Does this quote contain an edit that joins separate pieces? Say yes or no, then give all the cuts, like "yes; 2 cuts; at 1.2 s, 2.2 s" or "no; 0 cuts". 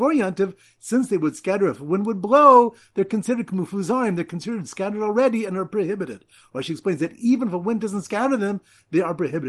no; 0 cuts